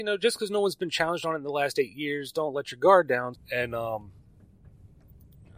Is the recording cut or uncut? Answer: cut